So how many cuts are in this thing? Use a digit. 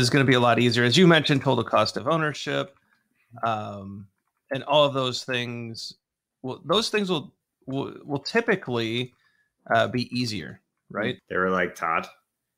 1